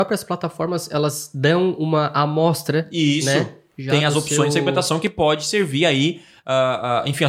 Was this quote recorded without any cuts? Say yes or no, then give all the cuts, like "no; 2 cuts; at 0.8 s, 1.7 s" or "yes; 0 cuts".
yes; 0 cuts